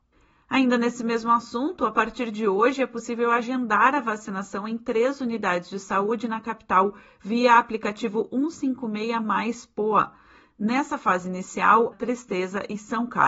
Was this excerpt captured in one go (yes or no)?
no